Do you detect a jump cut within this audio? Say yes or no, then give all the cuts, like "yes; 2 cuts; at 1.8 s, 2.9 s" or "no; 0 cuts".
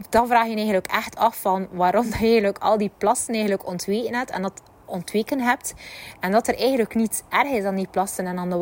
no; 0 cuts